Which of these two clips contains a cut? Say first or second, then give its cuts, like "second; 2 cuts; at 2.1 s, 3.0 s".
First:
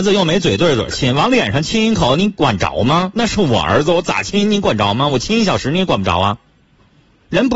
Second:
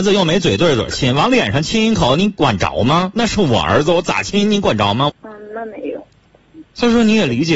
second; 1 cut; at 5.1 s